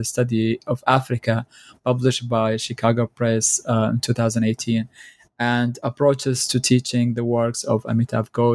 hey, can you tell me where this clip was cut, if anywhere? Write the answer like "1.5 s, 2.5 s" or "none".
none